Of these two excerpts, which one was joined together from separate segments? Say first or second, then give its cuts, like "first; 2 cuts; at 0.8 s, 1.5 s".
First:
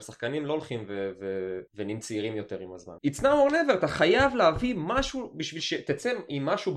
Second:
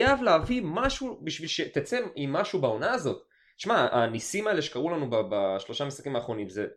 first; 2 cuts; at 1.7 s, 3.0 s